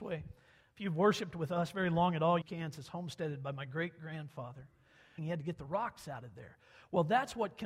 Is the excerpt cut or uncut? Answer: cut